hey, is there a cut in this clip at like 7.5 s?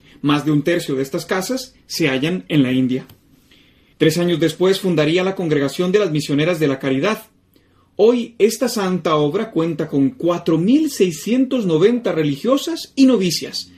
no; 1 cut; at 3.9 s

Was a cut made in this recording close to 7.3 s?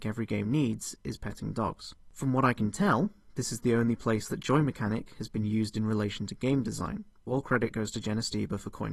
yes; 1 cut; at 7.3 s

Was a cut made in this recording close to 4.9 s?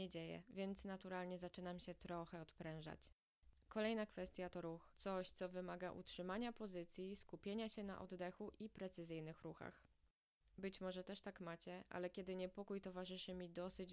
yes; 1 cut; at 4.9 s

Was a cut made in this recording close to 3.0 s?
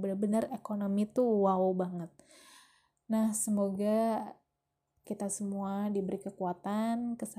no; 1 cut; at 5.0 s

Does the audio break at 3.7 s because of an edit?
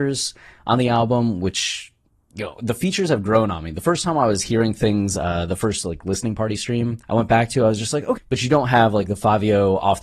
no; 2 cuts; at 7.0 s, 8.2 s

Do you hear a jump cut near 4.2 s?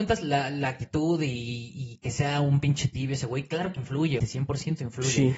yes; 1 cut; at 4.2 s

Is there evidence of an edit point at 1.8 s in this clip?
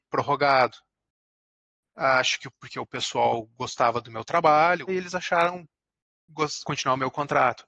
no; 2 cuts; at 4.9 s, 6.6 s

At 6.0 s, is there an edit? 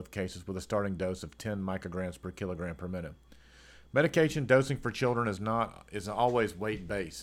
no; 0 cuts

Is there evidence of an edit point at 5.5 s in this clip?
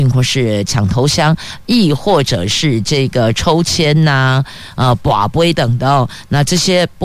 yes; 1 cut; at 5.5 s

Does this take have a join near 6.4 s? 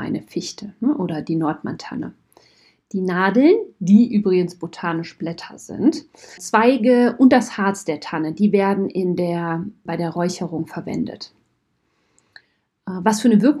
yes; 2 cuts; at 6.4 s, 9.9 s

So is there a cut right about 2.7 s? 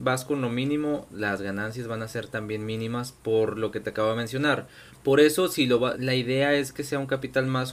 no; 2 cuts; at 4.9 s, 5.9 s

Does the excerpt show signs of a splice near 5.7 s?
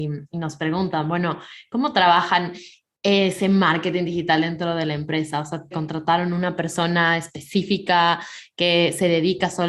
yes; 1 cut; at 5.7 s

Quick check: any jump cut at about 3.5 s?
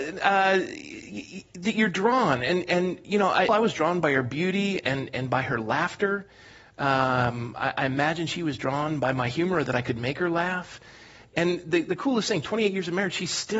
yes; 1 cut; at 3.5 s

